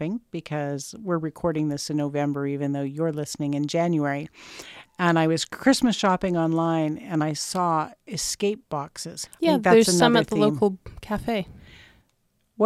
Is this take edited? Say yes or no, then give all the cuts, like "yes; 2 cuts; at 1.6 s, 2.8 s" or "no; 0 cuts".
yes; 1 cut; at 9.3 s